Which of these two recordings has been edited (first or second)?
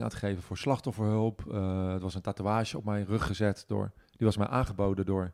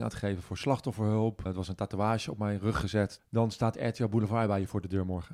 second